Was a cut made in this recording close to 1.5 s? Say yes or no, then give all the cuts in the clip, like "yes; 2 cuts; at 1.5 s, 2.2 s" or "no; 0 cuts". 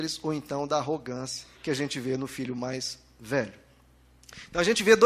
yes; 1 cut; at 1.5 s